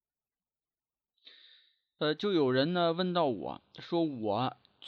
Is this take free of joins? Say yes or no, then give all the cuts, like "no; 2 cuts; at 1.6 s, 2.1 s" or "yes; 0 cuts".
yes; 0 cuts